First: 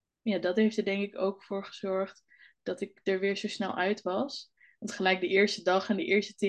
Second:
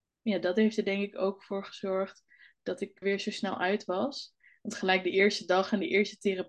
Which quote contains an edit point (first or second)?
second